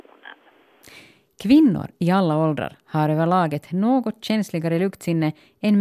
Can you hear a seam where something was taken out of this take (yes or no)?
no